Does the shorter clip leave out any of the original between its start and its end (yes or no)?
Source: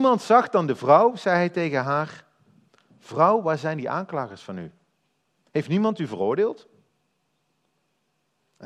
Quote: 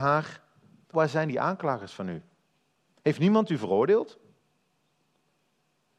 yes